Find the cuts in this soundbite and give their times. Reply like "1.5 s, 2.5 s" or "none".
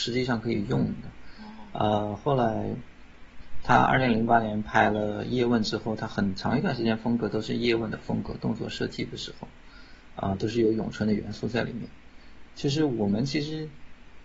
none